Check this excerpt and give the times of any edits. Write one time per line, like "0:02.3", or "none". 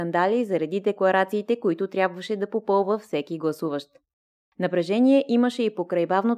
none